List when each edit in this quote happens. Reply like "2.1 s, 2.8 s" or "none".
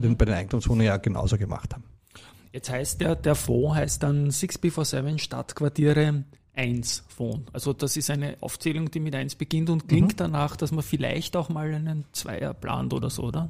none